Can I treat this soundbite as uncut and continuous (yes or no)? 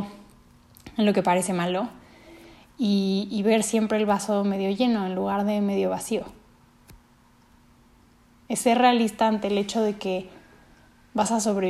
yes